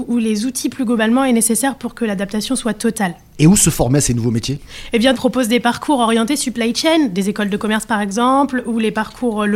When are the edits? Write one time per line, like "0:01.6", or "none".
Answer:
0:05.1